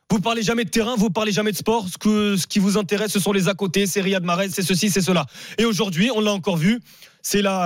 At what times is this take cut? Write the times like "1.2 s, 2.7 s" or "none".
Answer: 4.5 s